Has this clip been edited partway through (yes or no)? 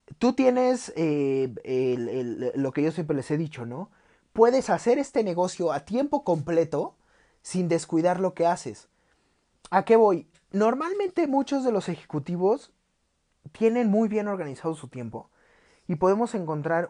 no